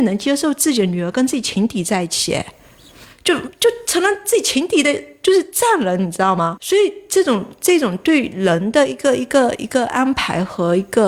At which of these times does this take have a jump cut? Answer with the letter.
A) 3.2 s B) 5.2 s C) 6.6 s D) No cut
C